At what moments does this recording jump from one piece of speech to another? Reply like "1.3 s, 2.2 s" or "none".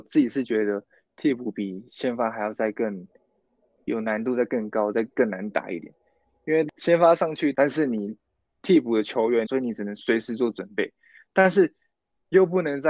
7.5 s, 9.5 s